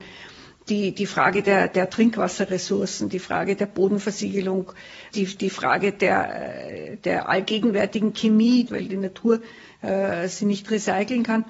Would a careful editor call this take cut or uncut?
cut